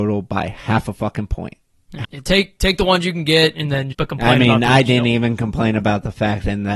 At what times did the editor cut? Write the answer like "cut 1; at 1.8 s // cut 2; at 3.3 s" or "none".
cut 1; at 2.0 s // cut 2; at 3.9 s